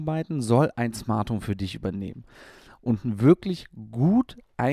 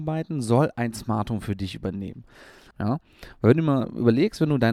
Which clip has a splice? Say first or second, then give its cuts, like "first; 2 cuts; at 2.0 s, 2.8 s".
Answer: second; 1 cut; at 2.7 s